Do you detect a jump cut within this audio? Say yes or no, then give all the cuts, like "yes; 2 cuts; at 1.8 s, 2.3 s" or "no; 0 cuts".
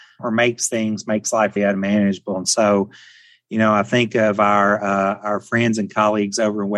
yes; 1 cut; at 1.6 s